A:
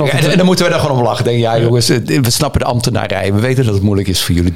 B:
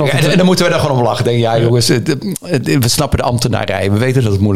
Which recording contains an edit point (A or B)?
A